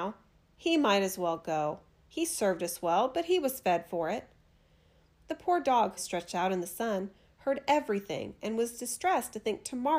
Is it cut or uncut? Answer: cut